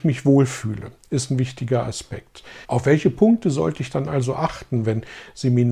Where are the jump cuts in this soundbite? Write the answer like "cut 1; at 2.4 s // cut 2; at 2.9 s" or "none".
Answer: cut 1; at 2.6 s

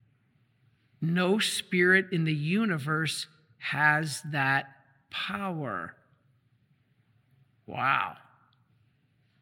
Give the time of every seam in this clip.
none

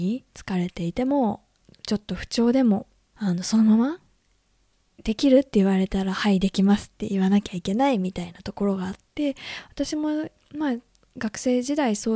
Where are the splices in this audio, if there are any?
cut 1; at 3.1 s

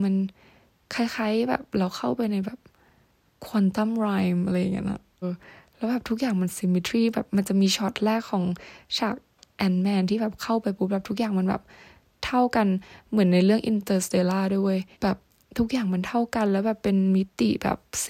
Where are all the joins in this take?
cut 1; at 5.2 s // cut 2; at 14.9 s

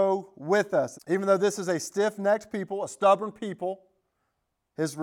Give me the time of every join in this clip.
cut 1; at 0.9 s

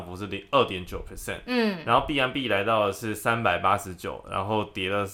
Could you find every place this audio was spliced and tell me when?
none

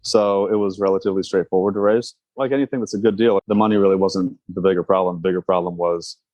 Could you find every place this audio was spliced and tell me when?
cut 1; at 3.4 s

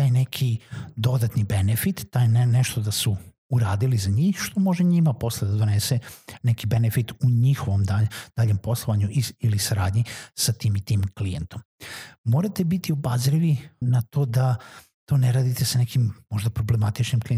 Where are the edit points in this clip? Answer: cut 1; at 13.8 s

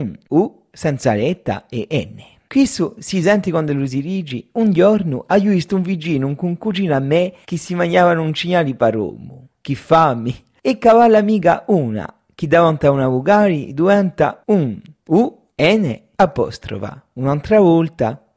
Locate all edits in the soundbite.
none

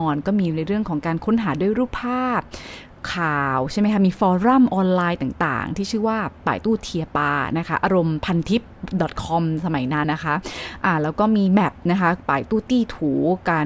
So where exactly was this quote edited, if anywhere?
cut 1; at 10.0 s

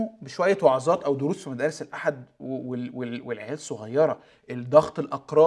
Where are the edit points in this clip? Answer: none

